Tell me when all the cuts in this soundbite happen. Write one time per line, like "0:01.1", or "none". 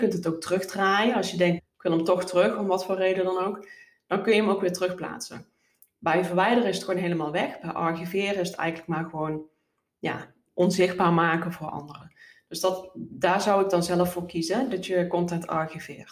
0:01.6
0:10.5